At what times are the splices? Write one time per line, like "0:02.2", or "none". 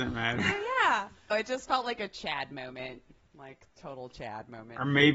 0:01.3
0:03.3